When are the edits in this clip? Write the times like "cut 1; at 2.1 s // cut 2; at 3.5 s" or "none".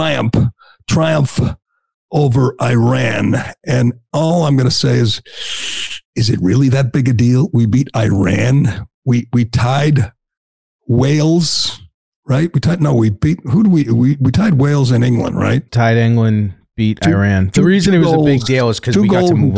cut 1; at 15.7 s

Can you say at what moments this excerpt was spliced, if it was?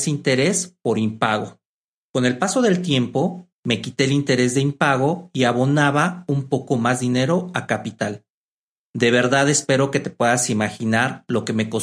cut 1; at 3.5 s

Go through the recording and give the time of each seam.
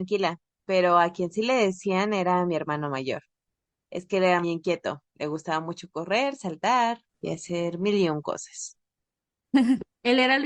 cut 1; at 4.4 s

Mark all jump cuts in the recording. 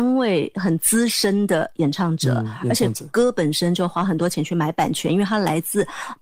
none

